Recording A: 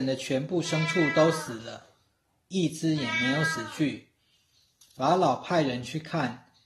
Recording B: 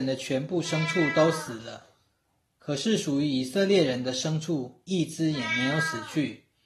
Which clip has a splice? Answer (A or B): A